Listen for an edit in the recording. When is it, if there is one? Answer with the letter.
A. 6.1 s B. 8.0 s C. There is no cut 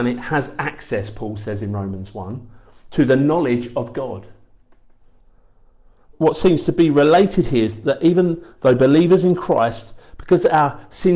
A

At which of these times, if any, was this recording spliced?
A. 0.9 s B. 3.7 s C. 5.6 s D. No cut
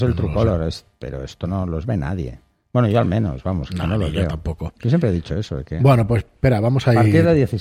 A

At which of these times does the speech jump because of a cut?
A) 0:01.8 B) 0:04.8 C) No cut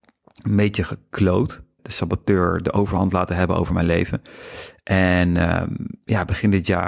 A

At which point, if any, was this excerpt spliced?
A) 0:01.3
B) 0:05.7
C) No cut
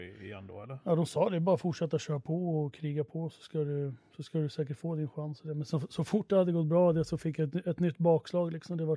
C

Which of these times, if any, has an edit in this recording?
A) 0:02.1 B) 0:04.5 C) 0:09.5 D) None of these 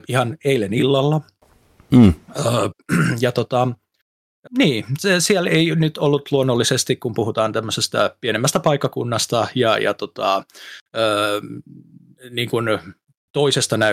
B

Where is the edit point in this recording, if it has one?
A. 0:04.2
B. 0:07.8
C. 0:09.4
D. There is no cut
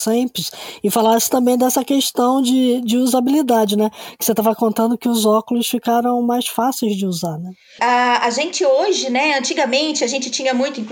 B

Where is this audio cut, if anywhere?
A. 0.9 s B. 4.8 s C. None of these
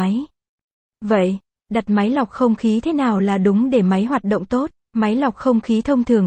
B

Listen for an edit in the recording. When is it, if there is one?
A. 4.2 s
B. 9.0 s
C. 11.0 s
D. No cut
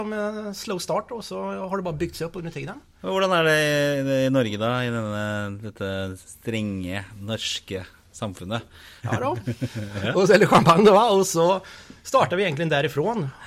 B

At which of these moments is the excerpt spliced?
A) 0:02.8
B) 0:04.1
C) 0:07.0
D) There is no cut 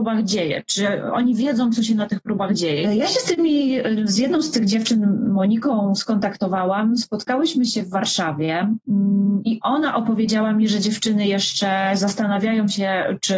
A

